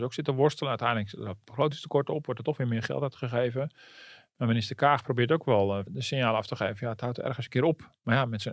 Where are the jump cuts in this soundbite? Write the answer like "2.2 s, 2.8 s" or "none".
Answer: 5.9 s